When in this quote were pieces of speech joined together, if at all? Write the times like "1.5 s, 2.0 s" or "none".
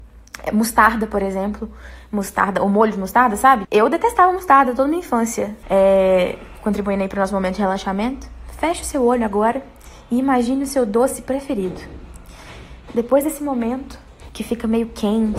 3.6 s, 5.6 s, 14.3 s